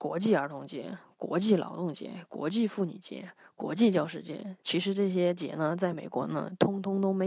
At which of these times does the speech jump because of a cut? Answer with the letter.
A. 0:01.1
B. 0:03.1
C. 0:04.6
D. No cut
D